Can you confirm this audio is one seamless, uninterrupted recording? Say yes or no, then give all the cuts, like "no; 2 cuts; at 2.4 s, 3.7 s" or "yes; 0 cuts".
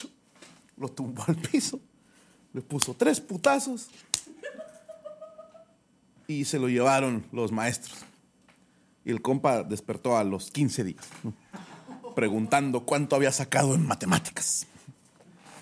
yes; 0 cuts